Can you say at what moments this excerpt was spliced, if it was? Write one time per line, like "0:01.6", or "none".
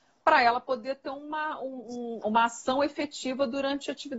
0:02.2